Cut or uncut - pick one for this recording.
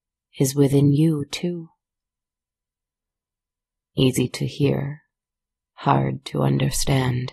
uncut